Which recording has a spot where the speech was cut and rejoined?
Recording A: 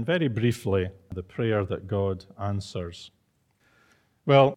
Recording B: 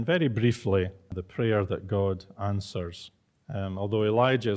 B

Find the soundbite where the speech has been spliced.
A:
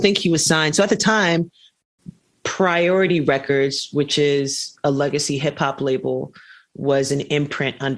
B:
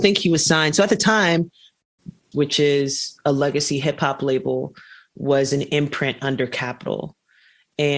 B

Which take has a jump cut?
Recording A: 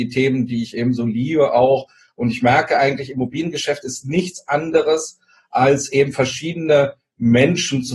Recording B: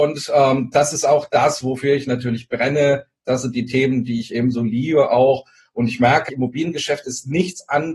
B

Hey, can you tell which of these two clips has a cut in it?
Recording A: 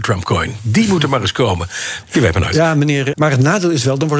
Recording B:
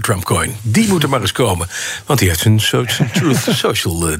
A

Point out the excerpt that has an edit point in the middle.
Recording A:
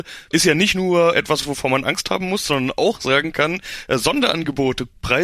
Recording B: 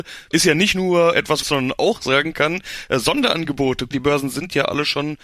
B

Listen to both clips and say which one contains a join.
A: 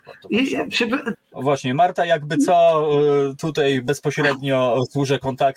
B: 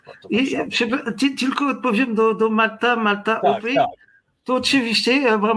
A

